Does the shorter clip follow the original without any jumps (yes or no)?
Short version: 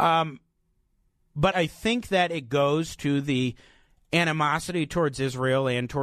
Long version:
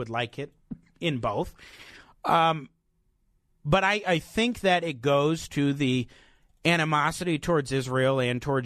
no